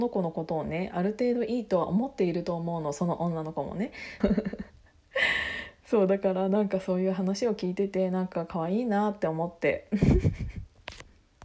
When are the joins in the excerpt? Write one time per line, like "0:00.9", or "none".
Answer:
0:04.2